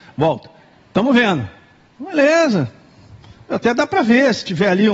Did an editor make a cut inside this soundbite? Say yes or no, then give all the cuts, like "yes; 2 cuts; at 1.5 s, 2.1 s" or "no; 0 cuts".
no; 0 cuts